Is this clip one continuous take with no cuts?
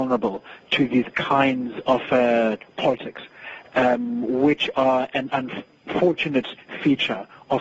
yes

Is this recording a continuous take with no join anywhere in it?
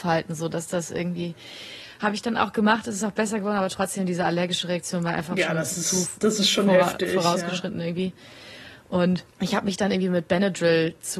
no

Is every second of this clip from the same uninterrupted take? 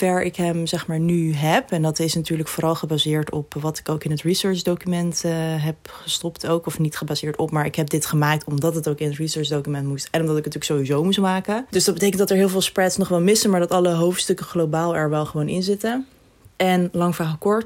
yes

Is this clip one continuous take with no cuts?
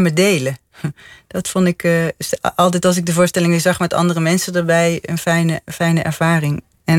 yes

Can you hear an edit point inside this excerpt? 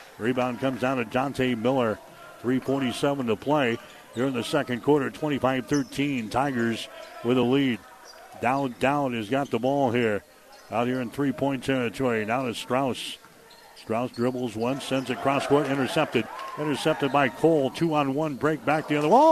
no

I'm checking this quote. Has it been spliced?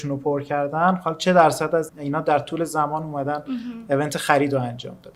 yes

